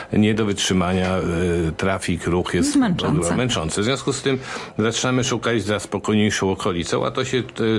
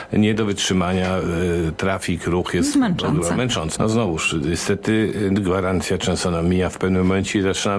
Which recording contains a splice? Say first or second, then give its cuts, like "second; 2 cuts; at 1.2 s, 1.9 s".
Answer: second; 1 cut; at 3.8 s